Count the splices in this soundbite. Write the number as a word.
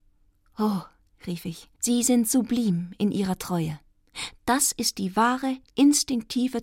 one